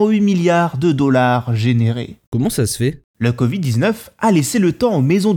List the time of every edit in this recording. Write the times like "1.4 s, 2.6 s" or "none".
2.3 s